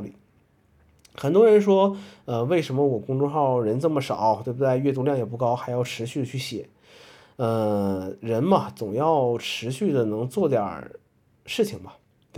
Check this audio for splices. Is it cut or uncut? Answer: uncut